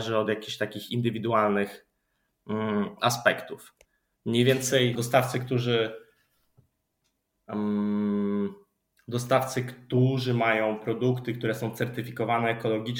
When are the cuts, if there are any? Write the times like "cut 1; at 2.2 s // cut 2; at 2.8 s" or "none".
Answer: cut 1; at 4.9 s